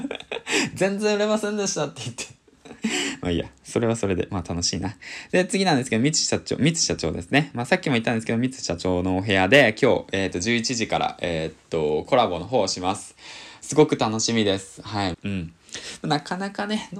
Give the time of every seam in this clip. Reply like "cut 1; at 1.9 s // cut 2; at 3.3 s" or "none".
cut 1; at 15.1 s